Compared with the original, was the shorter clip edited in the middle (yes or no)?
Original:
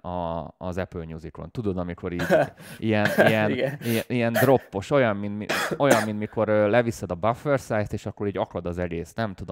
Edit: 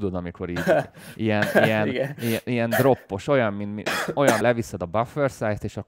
yes